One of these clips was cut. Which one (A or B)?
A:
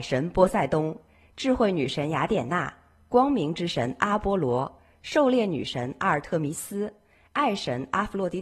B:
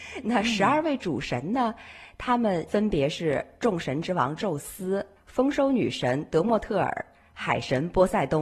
B